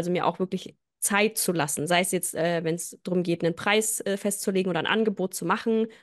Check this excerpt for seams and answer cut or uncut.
uncut